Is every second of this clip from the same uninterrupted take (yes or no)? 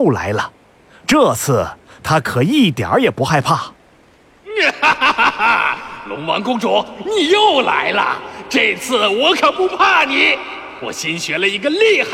yes